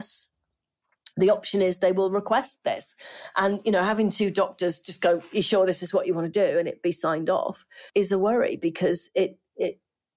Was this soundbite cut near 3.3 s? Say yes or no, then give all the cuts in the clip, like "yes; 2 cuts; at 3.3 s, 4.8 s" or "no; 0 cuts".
no; 1 cut; at 7.9 s